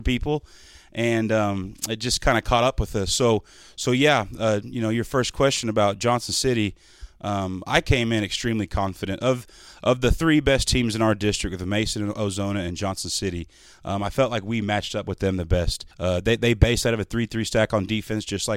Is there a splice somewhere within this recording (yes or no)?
yes